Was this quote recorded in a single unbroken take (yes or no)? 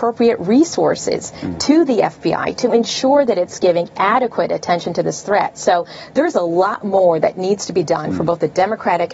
yes